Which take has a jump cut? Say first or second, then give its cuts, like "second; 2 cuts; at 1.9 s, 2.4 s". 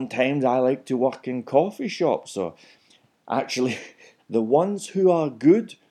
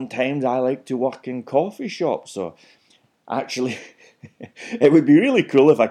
first; 1 cut; at 4.2 s